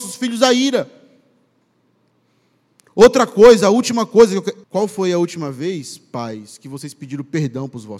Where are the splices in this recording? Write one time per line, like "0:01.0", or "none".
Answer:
0:04.6